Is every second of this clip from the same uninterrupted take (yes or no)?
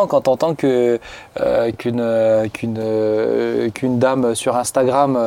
yes